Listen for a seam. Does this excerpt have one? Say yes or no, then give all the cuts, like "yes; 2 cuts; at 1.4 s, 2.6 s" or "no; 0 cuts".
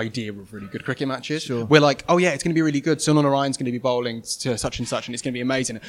no; 0 cuts